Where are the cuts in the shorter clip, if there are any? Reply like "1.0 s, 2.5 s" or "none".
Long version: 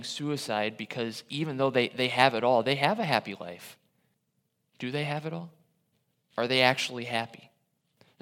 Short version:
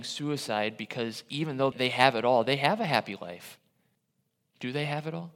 1.7 s